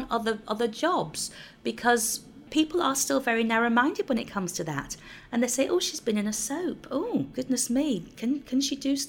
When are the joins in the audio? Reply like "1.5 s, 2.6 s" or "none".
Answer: none